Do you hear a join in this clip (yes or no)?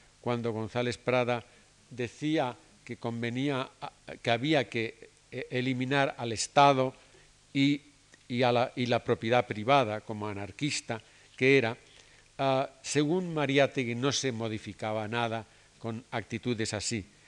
no